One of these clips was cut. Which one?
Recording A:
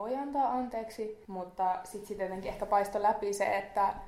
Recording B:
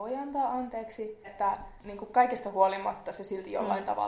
B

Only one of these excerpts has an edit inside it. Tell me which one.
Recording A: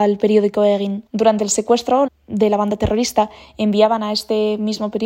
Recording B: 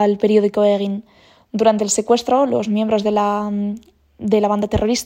A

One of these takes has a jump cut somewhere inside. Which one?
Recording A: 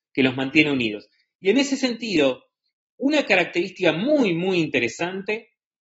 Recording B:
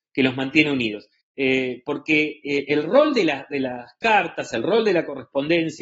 B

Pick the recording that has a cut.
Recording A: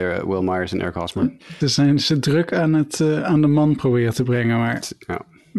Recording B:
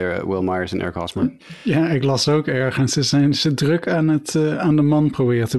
A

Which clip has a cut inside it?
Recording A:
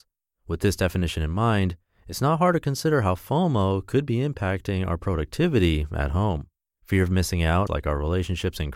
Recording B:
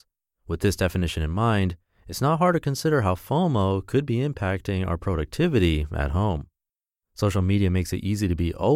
A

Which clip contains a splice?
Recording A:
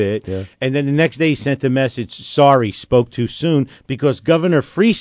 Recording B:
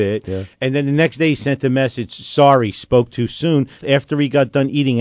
B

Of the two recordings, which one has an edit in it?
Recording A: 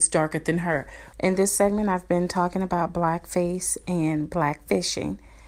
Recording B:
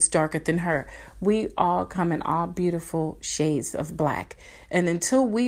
A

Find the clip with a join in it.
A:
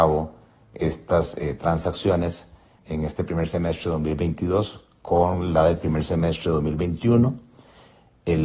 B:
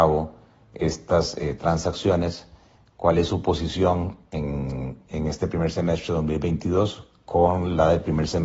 A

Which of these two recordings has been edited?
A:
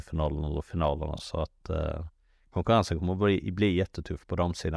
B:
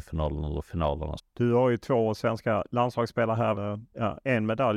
B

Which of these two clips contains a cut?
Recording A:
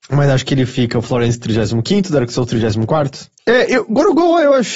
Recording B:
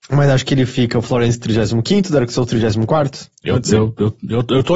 A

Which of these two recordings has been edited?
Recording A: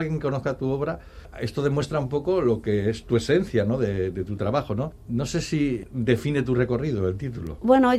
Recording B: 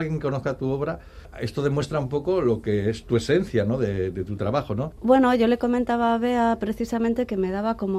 B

